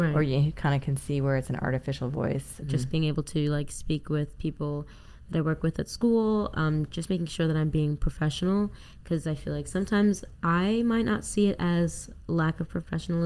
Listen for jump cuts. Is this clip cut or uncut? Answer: cut